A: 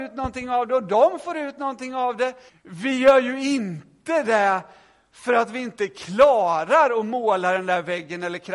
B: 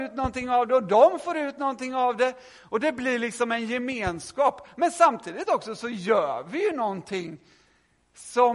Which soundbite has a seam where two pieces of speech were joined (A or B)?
A